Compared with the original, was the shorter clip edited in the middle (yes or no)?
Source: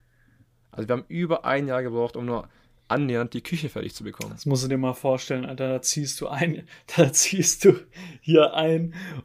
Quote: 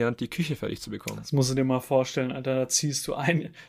no